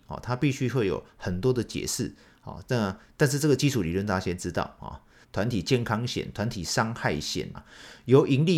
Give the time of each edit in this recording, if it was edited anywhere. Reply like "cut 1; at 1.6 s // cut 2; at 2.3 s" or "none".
cut 1; at 5.2 s // cut 2; at 7.5 s